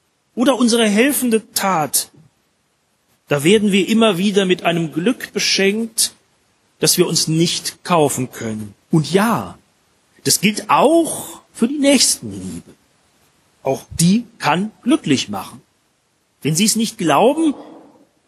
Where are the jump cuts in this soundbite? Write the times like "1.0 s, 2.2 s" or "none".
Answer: 8.8 s, 11.5 s

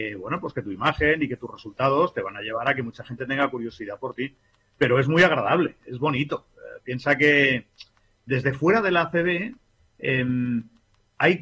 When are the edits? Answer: none

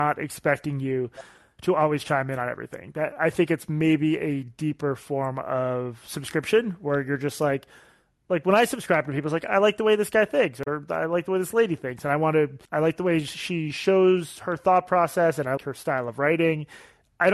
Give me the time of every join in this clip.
12.7 s, 15.6 s

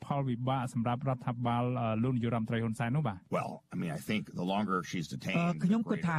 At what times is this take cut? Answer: none

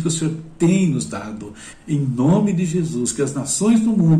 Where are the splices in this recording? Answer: 1.7 s

